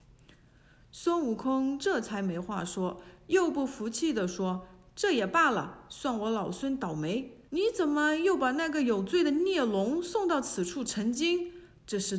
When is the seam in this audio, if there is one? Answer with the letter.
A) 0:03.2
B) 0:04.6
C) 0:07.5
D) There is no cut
C